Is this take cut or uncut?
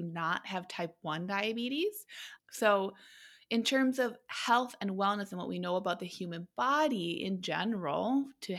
cut